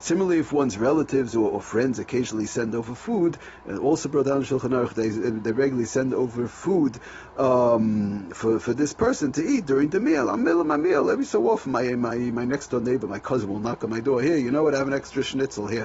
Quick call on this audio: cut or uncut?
uncut